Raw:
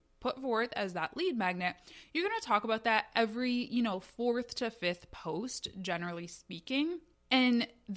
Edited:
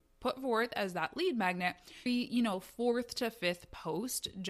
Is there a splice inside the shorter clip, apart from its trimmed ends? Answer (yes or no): yes